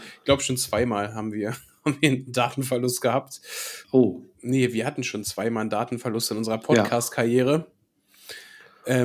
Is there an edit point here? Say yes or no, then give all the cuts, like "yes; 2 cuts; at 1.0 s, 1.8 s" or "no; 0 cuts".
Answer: yes; 1 cut; at 3.8 s